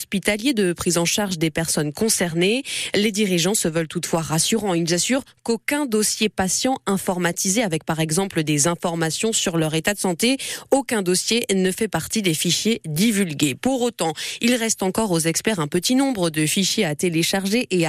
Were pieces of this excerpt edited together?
no; 0 cuts

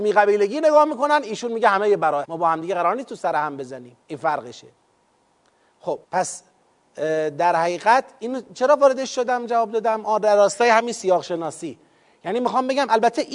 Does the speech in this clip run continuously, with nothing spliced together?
no; 3 cuts; at 2.2 s, 4.0 s, 6.0 s

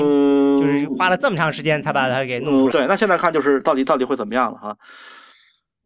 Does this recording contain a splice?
yes; 1 cut; at 2.7 s

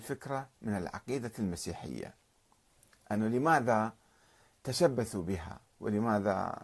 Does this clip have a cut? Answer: no; 0 cuts

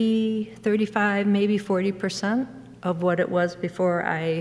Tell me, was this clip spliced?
no; 0 cuts

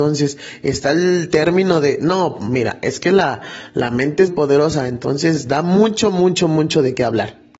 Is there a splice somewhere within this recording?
yes; 1 cut; at 4.3 s

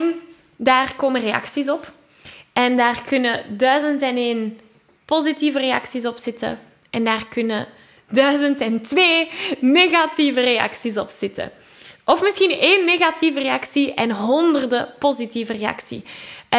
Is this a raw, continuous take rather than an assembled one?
yes; 0 cuts

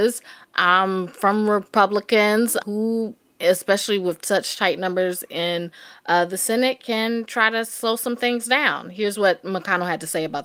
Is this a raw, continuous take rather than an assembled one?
no; 1 cut; at 2.6 s

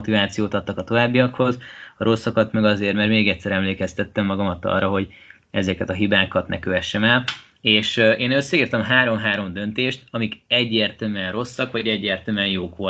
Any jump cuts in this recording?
no; 0 cuts

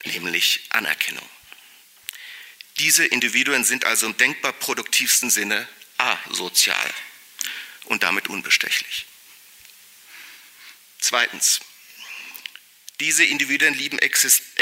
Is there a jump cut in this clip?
no; 0 cuts

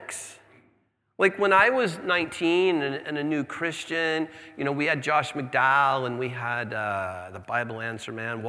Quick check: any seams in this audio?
no; 0 cuts

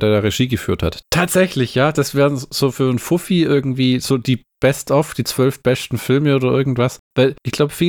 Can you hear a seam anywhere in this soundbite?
yes; 1 cut; at 1.0 s

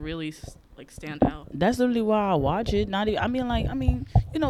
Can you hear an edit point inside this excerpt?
no; 0 cuts

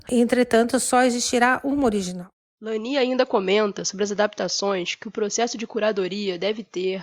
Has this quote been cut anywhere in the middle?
no; 0 cuts

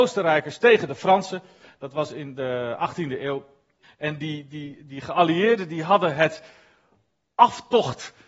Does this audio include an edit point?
yes; 1 cut; at 3.8 s

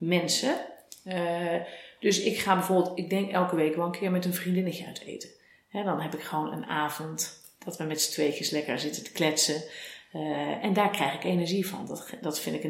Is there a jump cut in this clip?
no; 0 cuts

